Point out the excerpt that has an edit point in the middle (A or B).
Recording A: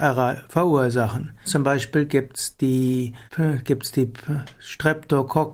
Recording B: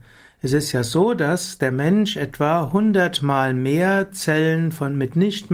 A